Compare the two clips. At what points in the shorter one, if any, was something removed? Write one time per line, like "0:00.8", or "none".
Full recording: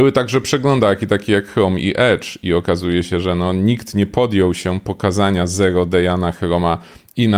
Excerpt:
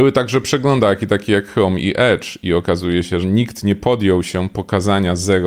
0:03.2